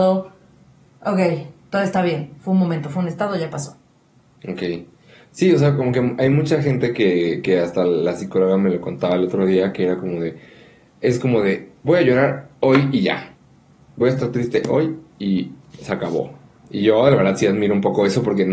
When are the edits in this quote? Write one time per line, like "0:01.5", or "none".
none